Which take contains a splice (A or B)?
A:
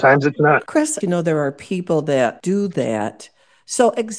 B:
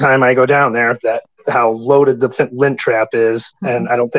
A